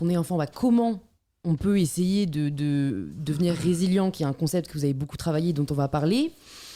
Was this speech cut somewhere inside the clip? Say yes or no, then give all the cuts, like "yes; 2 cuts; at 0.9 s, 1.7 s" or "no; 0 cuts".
no; 0 cuts